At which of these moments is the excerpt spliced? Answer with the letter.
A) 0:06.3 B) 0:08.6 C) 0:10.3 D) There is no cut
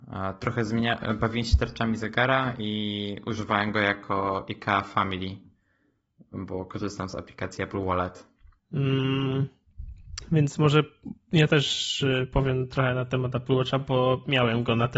B